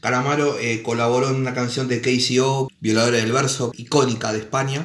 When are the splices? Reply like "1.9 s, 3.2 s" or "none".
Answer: 2.7 s, 3.7 s